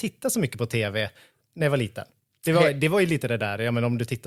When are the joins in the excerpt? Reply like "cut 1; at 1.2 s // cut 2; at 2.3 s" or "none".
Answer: none